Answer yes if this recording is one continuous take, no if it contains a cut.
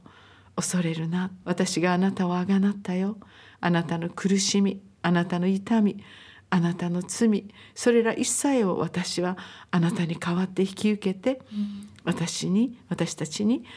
no